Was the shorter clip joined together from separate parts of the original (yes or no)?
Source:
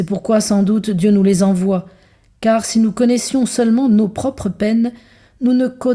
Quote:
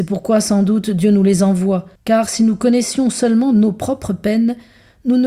yes